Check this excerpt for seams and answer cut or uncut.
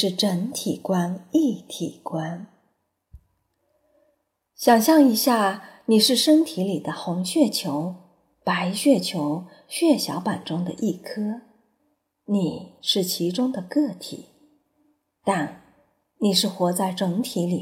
uncut